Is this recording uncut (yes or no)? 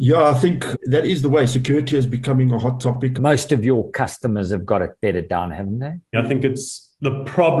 no